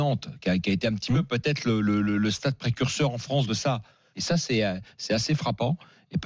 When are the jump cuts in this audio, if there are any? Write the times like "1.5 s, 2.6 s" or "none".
4.1 s

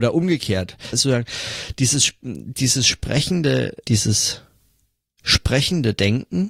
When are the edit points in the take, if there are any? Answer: 0.9 s, 3.8 s

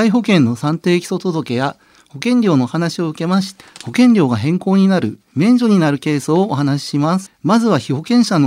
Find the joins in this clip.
3.6 s, 7.3 s

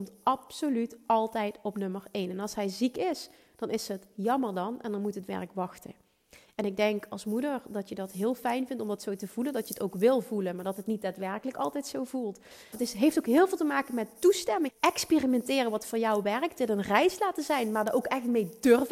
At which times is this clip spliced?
12.7 s, 14.7 s

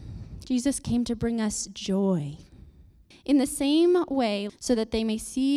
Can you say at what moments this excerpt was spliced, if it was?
3.1 s, 4.5 s

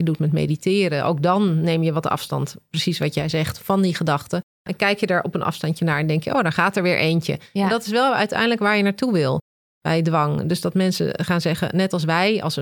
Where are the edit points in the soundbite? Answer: 4.5 s

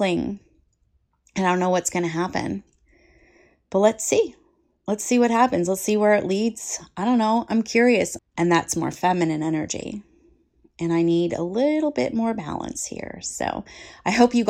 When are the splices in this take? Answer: 8.2 s

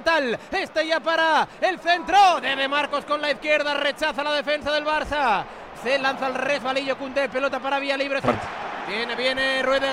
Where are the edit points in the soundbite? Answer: 5.7 s, 8.2 s

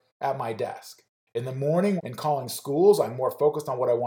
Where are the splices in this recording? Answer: 2.0 s

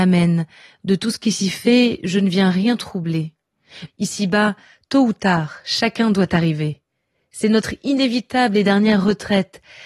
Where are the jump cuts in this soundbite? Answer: 3.9 s

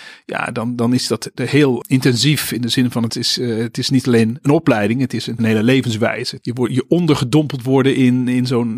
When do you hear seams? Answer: 4.4 s

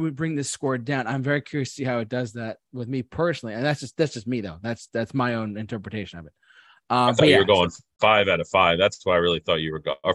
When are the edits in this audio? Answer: none

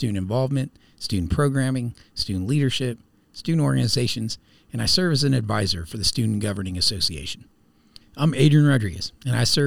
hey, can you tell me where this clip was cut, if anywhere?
8.0 s

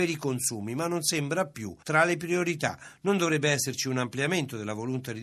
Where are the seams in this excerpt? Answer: none

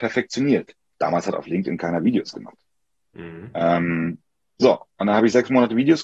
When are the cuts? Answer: 0.9 s

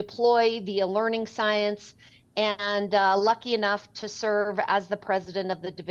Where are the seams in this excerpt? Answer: none

